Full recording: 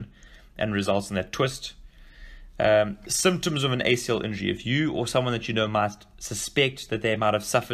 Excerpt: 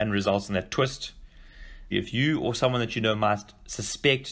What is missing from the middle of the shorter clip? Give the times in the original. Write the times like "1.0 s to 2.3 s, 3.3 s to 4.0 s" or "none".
2.5 s to 4.4 s